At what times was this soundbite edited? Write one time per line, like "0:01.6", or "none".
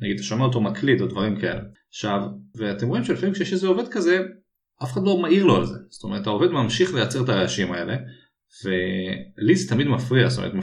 0:02.5